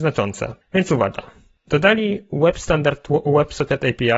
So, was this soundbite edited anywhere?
no; 0 cuts

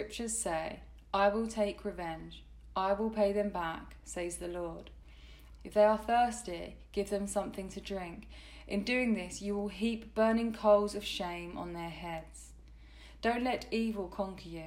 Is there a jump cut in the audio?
yes; 1 cut; at 5.6 s

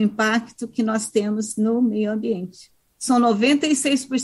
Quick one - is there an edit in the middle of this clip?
yes; 1 cut; at 2.9 s

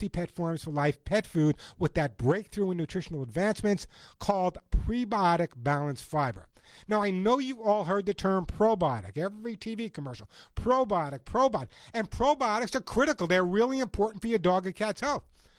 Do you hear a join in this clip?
no; 0 cuts

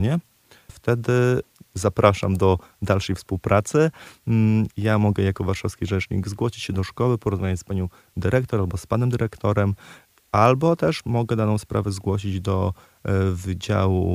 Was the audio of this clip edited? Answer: yes; 1 cut; at 4.7 s

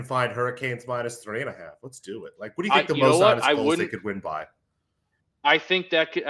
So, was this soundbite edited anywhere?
no; 0 cuts

